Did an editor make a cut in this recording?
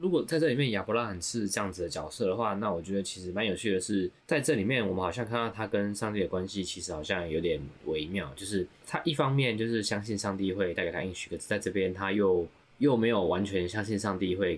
no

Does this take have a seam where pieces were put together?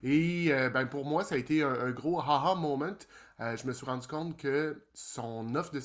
no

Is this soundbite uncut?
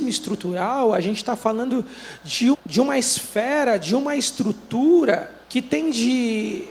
no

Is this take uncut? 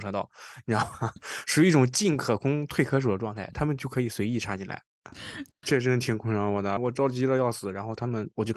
no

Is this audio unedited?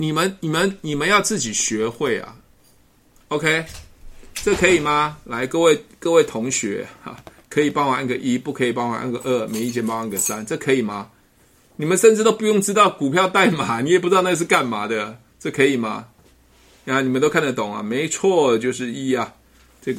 yes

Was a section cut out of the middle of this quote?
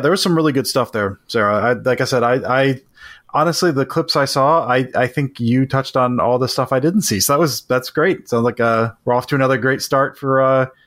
no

